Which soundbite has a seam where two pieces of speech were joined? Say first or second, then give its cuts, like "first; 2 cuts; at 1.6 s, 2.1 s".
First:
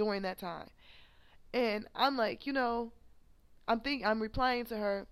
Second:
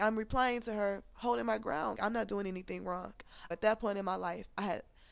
second; 2 cuts; at 1.9 s, 3.5 s